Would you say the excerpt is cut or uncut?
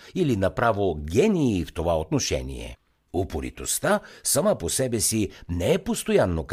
cut